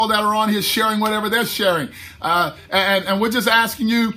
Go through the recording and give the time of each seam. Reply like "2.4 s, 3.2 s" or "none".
none

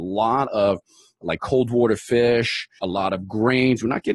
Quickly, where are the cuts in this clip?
1.2 s, 2.8 s

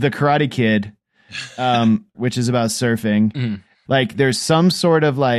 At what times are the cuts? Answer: 2.1 s, 3.9 s

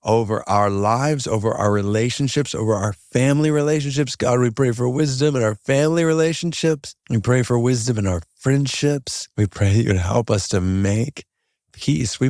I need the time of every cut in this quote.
7.0 s, 9.3 s

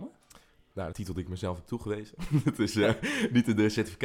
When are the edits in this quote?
0.9 s

